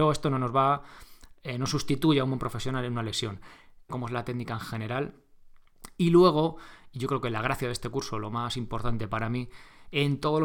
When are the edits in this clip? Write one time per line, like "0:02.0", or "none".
0:03.9